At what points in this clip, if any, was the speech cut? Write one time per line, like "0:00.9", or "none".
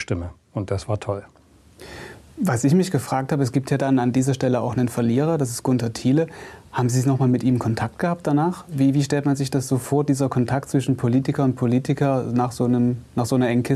none